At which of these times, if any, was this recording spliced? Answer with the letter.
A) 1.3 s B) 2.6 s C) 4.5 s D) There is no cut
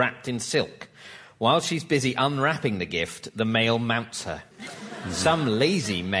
C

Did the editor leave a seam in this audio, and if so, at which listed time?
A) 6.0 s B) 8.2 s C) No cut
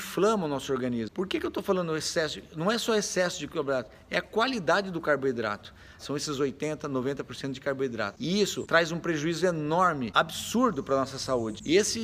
A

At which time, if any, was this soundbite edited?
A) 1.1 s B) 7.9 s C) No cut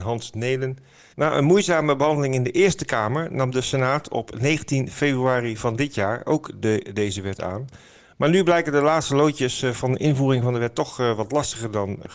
A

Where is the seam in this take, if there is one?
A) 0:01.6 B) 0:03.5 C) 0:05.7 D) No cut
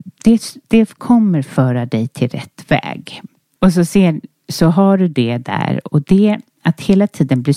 B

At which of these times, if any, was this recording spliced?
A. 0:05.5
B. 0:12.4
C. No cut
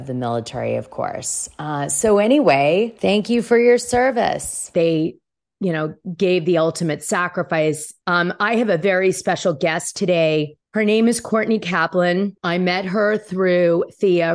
C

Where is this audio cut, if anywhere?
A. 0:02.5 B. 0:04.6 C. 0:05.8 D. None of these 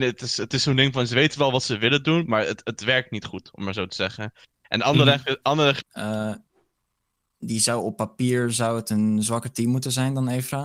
C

